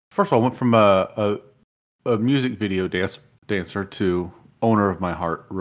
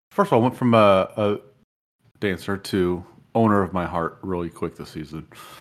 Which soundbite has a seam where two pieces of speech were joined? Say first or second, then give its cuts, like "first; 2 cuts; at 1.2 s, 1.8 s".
second; 1 cut; at 2.0 s